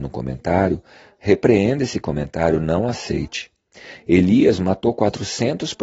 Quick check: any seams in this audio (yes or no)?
no